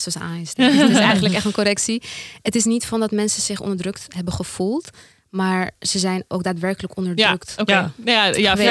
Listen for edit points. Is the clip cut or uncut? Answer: uncut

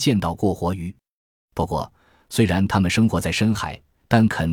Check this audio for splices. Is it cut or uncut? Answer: uncut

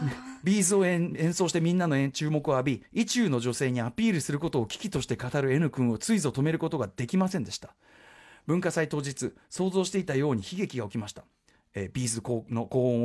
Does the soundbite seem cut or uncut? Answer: uncut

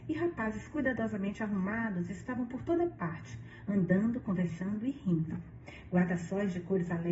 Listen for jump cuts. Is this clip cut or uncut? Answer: uncut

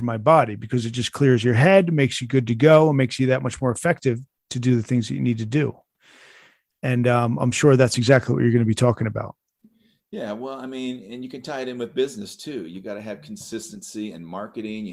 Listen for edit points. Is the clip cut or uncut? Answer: uncut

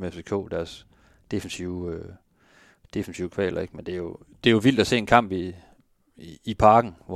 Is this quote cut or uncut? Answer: uncut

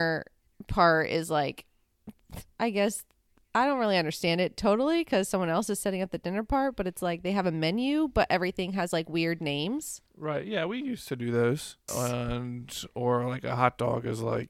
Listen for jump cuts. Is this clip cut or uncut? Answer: cut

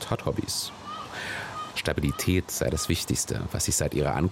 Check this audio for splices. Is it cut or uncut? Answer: cut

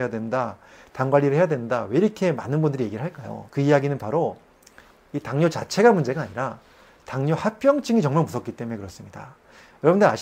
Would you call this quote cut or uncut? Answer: uncut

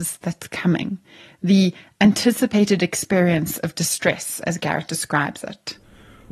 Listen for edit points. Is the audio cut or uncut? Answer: uncut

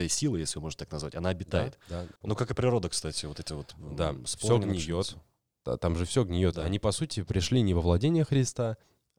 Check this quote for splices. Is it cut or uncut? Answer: cut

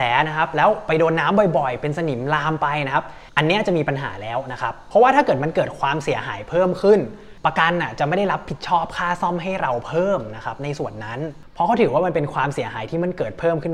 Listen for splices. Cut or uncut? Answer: uncut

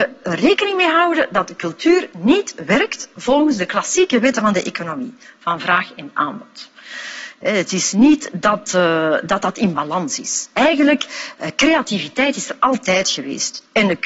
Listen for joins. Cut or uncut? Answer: uncut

